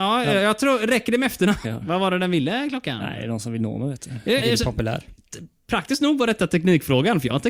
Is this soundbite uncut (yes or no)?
no